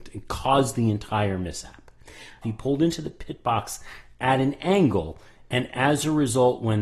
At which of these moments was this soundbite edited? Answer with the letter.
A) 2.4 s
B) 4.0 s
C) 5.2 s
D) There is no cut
A